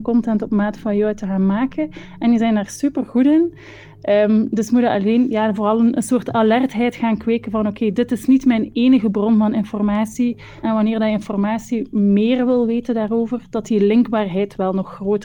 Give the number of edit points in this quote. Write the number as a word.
one